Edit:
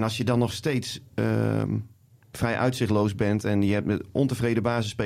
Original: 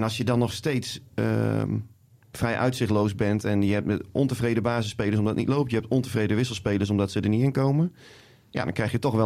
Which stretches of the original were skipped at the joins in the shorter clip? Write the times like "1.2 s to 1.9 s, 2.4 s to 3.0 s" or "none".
none